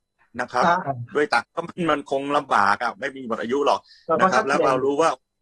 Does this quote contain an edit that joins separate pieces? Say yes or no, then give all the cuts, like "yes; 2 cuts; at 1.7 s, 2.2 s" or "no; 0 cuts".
yes; 1 cut; at 1.4 s